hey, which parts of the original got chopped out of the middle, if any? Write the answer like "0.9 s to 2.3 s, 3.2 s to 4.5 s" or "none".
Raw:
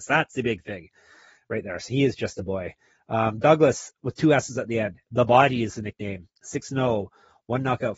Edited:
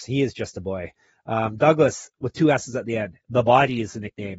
none